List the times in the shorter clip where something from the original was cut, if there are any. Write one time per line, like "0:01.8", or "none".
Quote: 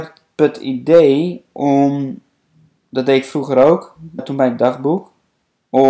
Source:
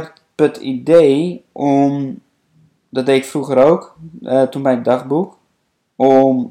0:04.2